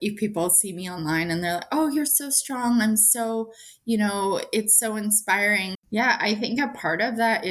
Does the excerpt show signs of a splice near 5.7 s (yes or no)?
yes